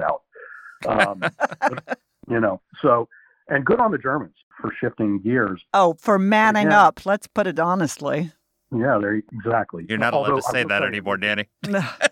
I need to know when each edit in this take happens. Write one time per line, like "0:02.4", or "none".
none